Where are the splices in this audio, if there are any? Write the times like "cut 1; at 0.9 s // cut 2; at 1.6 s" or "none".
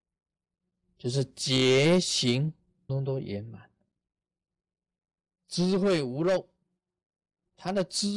cut 1; at 2.9 s